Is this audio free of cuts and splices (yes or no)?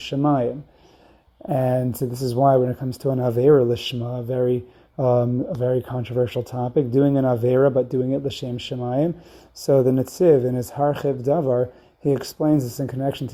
yes